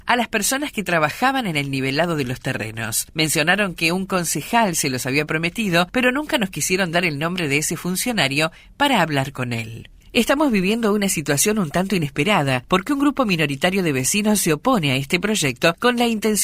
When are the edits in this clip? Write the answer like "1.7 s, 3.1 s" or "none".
10.0 s